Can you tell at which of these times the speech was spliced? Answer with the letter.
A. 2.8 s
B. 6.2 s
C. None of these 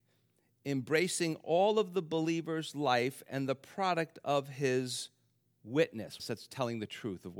B